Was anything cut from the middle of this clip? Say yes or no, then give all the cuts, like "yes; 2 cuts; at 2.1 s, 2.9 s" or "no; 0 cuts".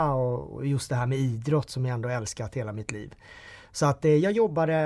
no; 0 cuts